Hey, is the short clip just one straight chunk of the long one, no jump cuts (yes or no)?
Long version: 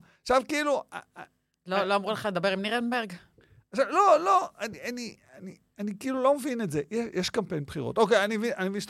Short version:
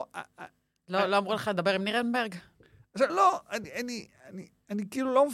no